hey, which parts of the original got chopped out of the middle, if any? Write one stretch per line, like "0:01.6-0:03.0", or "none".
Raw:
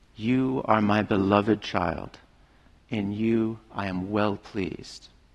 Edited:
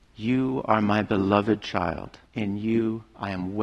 0:02.3-0:02.8